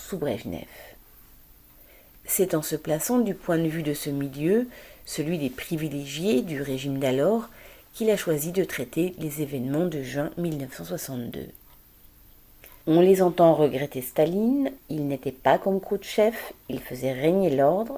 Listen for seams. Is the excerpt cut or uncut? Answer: cut